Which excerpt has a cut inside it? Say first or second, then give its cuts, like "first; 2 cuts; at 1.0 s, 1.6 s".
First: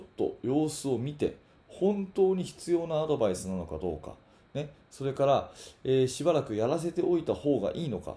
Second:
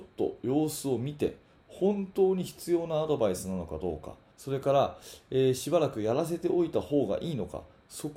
second; 1 cut; at 4.3 s